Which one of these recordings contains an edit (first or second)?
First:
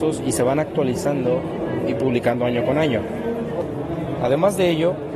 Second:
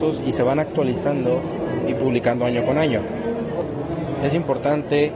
first